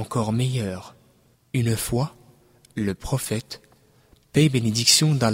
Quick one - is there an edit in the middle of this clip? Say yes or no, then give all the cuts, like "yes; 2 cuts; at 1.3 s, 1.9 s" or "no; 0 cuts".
yes; 1 cut; at 1.3 s